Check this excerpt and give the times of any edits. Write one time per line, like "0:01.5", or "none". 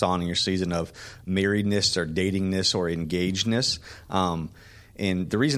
none